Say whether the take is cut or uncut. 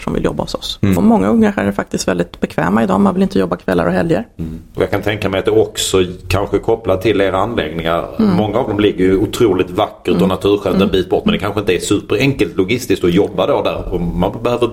cut